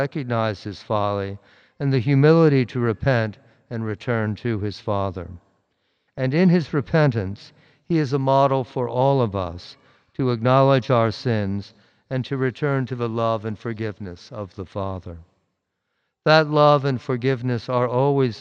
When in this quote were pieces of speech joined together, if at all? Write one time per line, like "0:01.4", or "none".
0:06.1